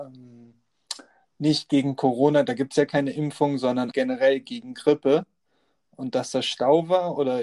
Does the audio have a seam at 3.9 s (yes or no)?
yes